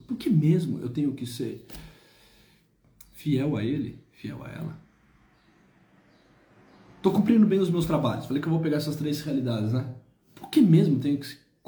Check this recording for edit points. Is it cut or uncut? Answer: uncut